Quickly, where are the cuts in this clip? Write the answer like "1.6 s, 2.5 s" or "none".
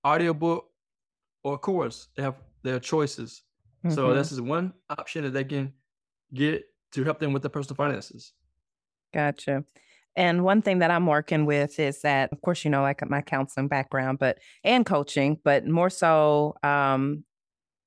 12.3 s